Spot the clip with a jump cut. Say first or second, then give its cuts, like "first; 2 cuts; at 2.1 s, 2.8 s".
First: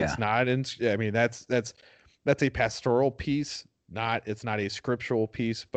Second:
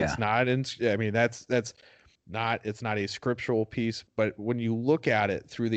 second; 2 cuts; at 2.2 s, 4.1 s